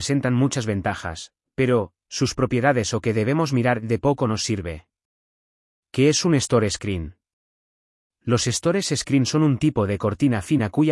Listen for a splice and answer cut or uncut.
cut